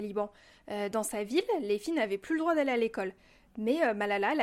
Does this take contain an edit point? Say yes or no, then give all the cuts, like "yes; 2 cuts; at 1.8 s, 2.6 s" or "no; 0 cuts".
no; 0 cuts